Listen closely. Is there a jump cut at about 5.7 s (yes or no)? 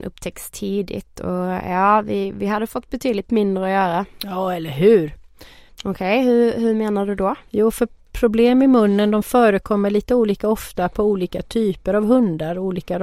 yes